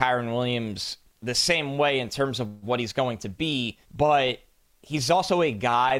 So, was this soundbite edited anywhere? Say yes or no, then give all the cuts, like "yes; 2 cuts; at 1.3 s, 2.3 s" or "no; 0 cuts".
yes; 2 cuts; at 1.0 s, 3.8 s